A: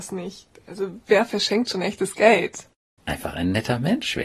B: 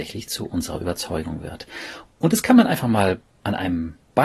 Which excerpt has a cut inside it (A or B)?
A